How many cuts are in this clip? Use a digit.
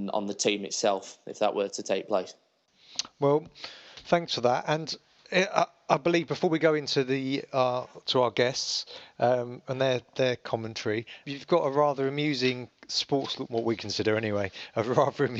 2